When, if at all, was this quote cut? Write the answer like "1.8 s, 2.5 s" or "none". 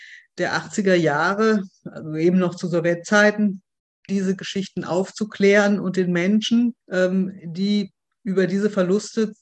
4.1 s, 6.8 s